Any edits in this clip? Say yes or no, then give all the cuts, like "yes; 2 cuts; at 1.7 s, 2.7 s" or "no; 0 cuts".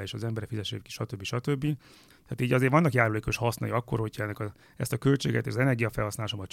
yes; 1 cut; at 2.1 s